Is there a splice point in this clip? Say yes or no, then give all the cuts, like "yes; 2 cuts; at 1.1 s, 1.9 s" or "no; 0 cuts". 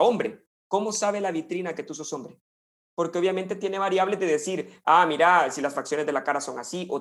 no; 0 cuts